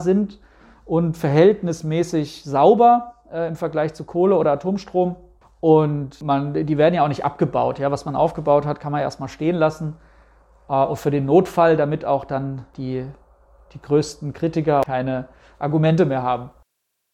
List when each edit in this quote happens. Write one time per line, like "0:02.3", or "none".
none